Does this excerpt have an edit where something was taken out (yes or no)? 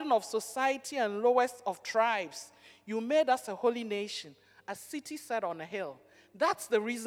no